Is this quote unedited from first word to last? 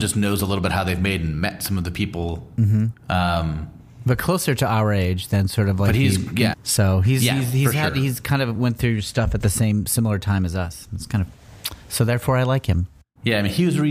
no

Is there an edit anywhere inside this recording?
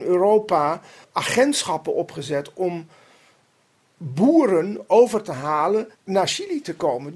yes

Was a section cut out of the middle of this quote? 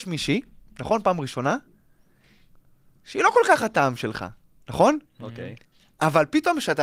no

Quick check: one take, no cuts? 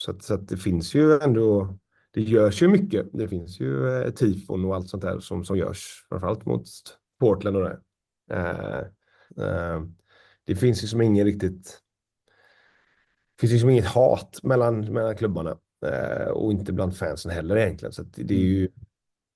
no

